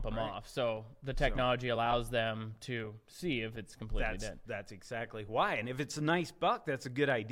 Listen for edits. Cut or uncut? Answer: uncut